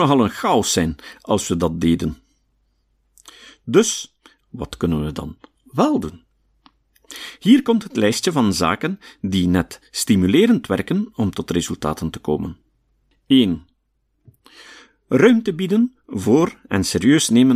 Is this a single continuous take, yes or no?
no